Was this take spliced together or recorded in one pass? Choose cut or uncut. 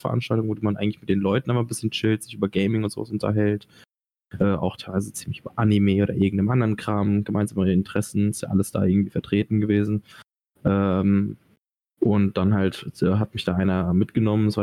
uncut